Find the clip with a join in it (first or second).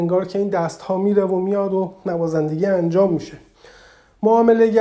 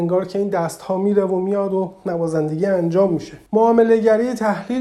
second